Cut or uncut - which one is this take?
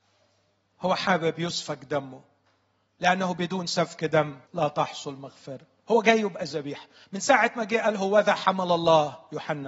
cut